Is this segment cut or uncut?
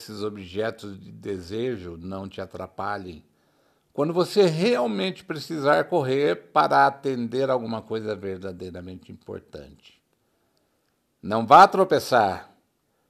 uncut